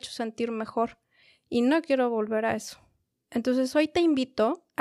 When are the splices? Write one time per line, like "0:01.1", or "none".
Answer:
none